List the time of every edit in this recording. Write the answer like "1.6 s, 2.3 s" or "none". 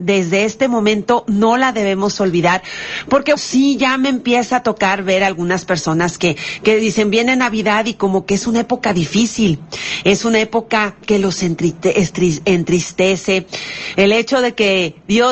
3.4 s, 14.0 s